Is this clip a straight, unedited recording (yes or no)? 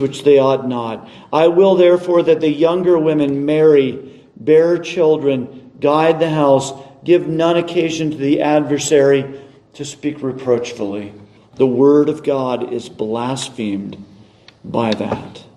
no